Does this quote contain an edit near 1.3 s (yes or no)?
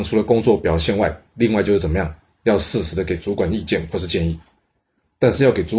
no